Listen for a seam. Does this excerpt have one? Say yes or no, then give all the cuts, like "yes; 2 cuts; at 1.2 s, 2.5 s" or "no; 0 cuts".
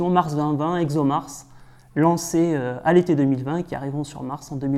no; 0 cuts